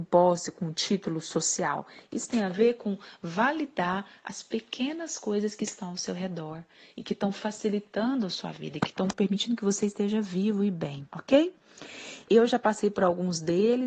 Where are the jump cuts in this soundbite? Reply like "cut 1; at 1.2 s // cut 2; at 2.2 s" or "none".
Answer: cut 1; at 11.1 s // cut 2; at 12.3 s